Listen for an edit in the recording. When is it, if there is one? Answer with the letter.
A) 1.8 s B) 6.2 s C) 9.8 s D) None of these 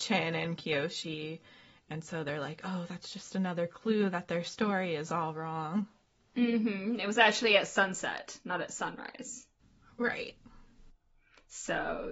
D